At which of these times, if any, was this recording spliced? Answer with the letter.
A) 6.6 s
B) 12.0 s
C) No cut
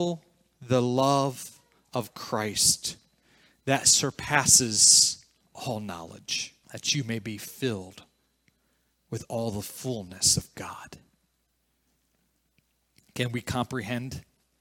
A